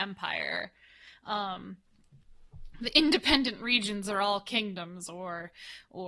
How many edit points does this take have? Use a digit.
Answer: 0